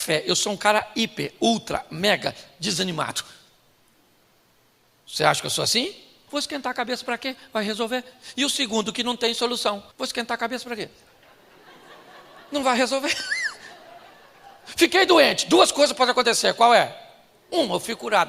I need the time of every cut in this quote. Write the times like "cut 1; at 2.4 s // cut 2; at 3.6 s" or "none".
cut 1; at 6.3 s // cut 2; at 9.9 s